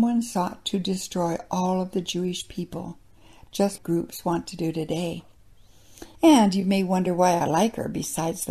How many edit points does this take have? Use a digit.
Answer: 2